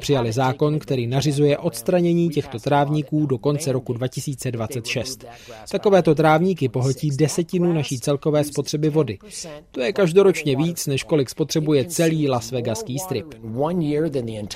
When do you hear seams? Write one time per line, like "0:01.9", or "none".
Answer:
none